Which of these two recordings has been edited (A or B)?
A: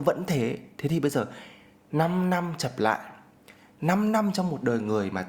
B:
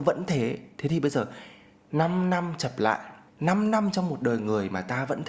B